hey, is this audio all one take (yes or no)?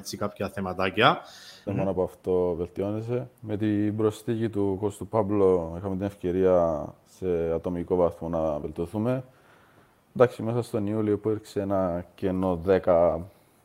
no